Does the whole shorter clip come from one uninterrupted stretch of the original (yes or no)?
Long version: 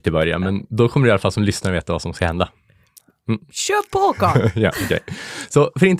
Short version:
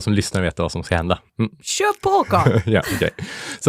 no